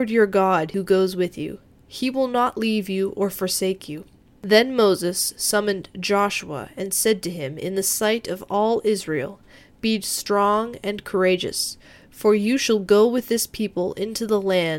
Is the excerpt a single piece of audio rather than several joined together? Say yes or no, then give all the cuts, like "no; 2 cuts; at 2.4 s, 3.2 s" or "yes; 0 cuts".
yes; 0 cuts